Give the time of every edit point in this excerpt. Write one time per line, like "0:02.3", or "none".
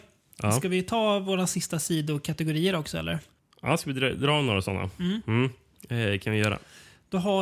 none